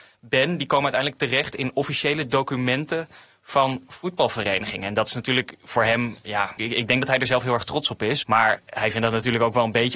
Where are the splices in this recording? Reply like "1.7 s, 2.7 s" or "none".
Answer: 6.6 s, 8.2 s